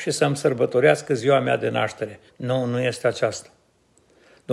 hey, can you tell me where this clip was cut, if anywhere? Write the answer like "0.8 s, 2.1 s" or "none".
2.3 s